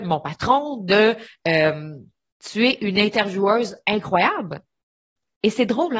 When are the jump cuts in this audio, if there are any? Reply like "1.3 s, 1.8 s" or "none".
2.3 s